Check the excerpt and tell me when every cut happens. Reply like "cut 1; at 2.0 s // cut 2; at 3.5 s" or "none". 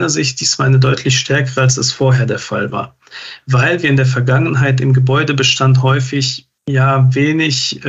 cut 1; at 6.6 s